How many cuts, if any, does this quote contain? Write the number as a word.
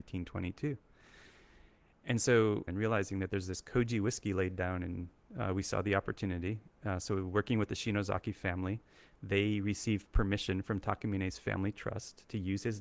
two